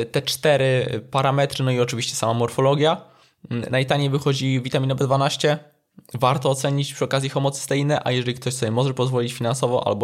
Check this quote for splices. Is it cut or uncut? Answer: uncut